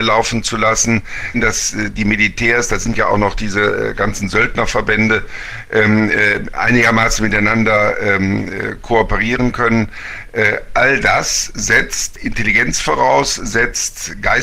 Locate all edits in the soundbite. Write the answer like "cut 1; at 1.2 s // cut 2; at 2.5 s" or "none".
cut 1; at 1.3 s